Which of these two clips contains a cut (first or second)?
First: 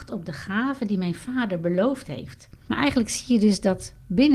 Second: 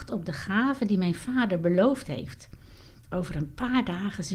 first